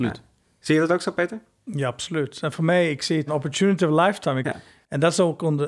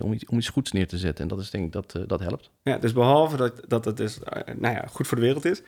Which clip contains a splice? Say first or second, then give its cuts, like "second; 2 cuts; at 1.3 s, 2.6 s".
first; 2 cuts; at 3.3 s, 4.4 s